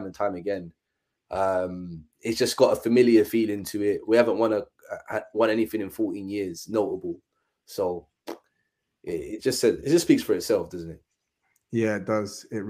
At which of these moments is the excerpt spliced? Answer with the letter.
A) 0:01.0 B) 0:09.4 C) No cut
B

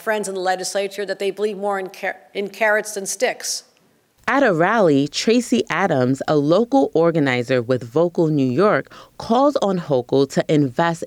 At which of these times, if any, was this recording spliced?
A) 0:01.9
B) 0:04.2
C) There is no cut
B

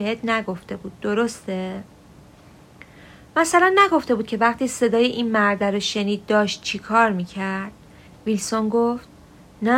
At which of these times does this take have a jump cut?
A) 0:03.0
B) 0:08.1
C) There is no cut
B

